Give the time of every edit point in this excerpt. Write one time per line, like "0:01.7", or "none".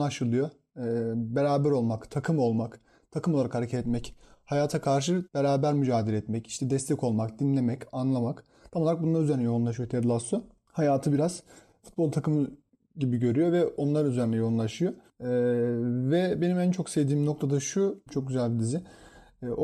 0:05.3
0:18.1

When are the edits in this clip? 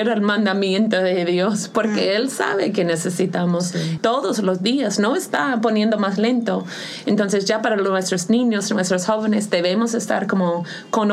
0:04.0

